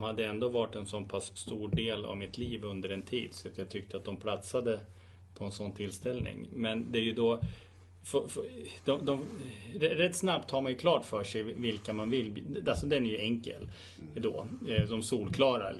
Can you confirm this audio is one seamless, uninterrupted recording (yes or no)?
yes